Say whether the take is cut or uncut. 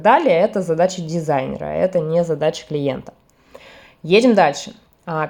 uncut